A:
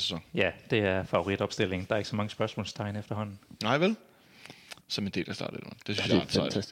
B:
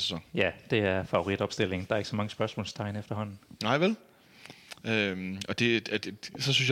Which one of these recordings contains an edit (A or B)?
A